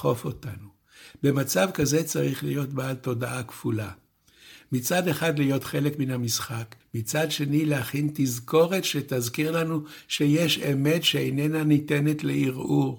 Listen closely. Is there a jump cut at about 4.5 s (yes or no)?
no